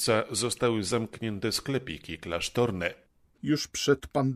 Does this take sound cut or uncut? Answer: cut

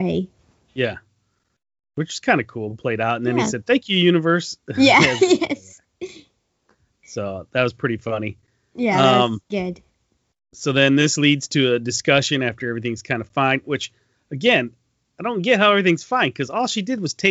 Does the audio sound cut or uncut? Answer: uncut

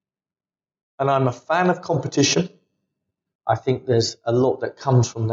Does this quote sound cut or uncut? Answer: cut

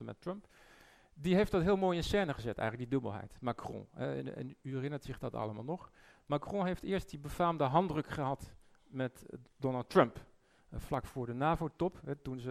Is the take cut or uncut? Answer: uncut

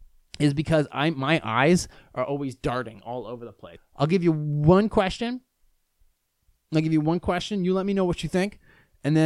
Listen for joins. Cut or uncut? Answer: cut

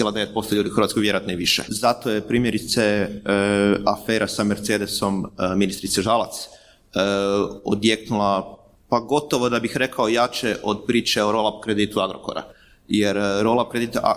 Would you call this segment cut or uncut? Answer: cut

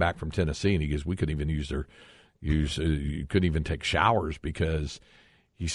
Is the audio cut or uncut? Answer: uncut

